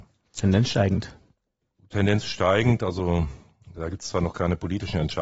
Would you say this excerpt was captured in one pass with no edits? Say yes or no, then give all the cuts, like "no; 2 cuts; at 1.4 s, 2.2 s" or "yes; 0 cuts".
yes; 0 cuts